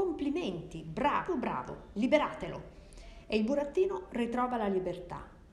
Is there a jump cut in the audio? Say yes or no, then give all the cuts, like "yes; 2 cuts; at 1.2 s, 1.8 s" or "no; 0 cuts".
yes; 1 cut; at 1.3 s